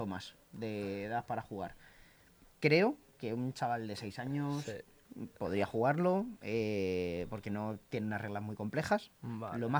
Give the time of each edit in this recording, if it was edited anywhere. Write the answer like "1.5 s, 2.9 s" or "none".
none